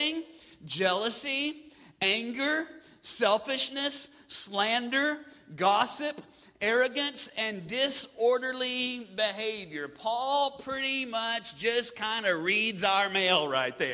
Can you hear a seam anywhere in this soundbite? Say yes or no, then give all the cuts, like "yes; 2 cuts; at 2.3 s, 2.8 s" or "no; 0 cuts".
no; 0 cuts